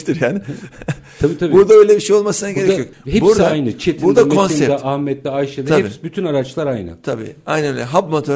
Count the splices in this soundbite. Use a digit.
0